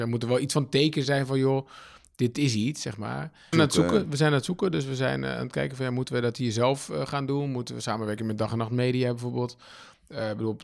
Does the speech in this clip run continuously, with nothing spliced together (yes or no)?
no